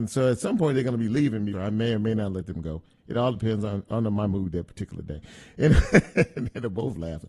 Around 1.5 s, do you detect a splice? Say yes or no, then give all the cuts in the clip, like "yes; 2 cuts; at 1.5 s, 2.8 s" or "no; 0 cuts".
yes; 1 cut; at 1.5 s